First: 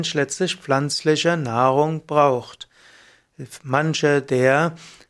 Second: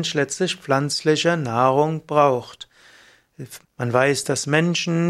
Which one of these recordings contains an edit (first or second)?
second